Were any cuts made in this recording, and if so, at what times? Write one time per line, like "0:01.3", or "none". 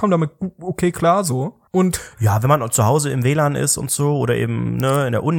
0:01.7